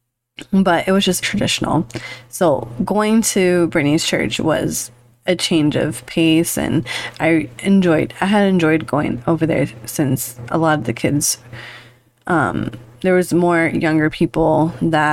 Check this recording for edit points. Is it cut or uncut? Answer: cut